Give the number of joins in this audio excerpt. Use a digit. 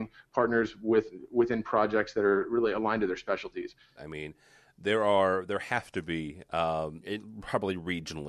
2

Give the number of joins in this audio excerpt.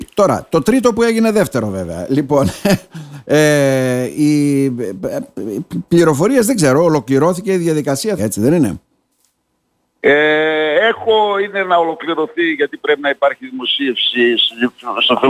1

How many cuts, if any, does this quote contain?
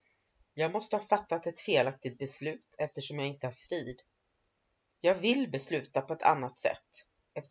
1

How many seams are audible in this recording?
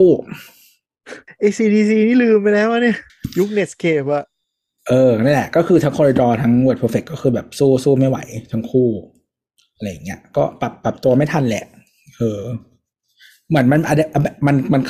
0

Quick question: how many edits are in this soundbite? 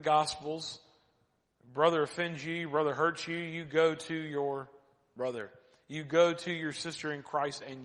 0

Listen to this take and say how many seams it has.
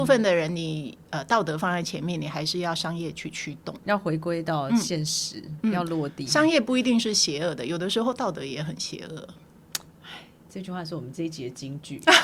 1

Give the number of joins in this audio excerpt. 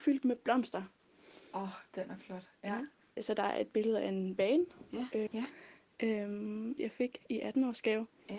3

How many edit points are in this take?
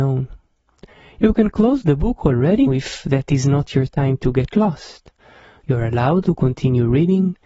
2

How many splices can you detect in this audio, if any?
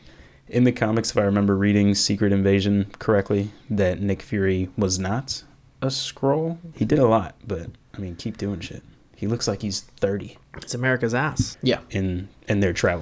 2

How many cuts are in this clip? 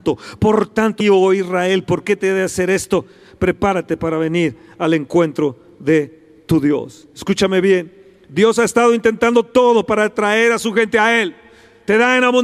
1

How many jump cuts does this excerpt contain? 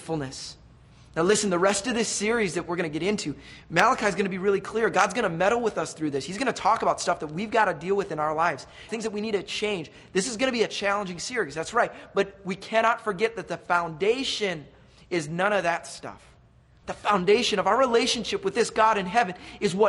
2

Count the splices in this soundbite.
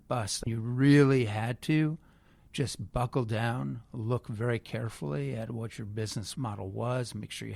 0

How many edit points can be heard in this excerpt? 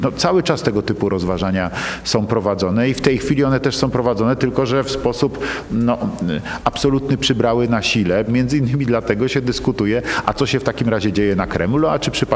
1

